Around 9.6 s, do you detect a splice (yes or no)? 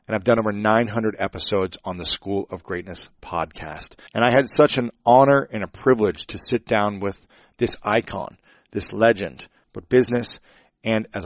yes